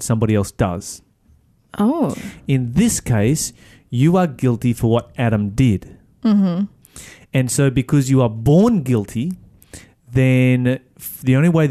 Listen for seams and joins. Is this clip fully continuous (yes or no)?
yes